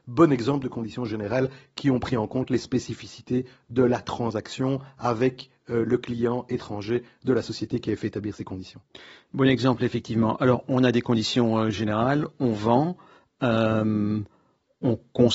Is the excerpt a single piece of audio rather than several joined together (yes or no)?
yes